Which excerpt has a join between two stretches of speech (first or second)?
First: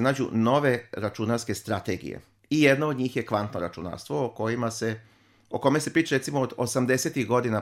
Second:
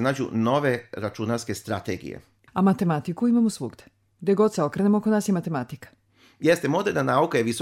second